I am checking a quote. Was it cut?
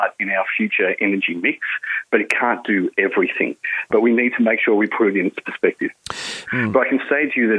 yes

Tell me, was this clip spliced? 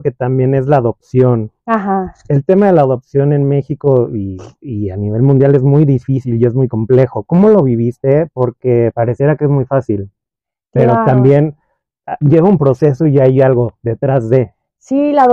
no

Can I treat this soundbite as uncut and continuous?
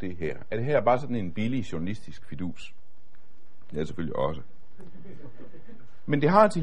yes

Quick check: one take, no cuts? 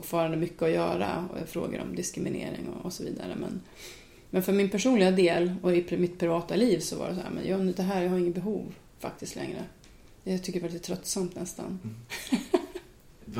yes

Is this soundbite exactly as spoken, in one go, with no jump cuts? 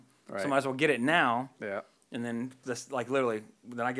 no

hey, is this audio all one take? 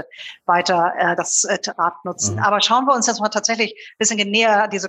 yes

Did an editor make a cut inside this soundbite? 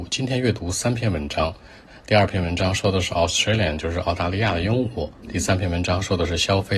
yes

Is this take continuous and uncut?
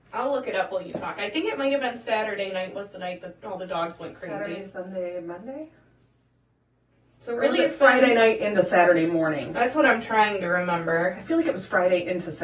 yes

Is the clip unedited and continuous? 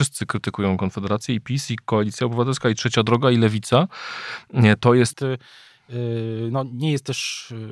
no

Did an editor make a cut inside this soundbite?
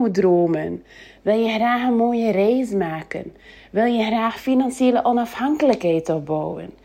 no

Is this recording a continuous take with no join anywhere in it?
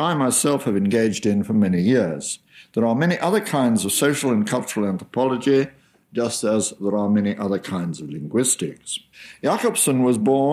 yes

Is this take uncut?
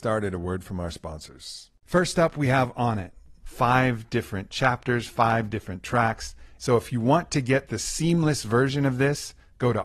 no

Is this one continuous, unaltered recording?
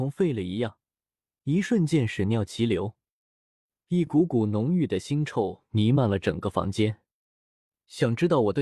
yes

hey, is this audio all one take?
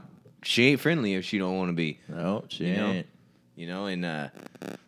yes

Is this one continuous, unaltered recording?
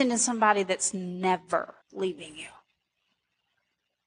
no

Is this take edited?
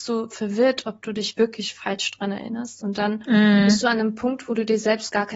no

